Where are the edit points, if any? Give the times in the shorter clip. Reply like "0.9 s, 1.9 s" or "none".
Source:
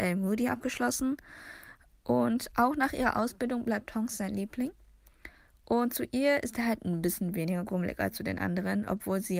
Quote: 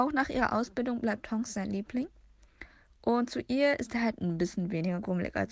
none